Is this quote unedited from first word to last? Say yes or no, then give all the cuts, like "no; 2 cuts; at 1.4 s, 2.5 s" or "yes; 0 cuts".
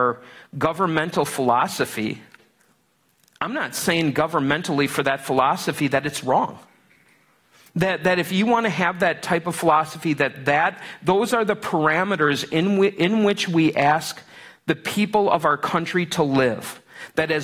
yes; 0 cuts